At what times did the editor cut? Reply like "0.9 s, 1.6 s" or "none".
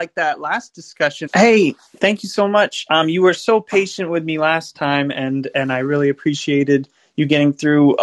1.3 s